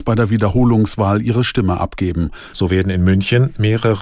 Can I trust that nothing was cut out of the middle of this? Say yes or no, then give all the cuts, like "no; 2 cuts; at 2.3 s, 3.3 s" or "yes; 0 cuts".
no; 1 cut; at 2.5 s